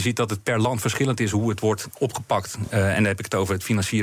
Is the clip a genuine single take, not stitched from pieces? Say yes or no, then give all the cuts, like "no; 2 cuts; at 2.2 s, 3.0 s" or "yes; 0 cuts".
yes; 0 cuts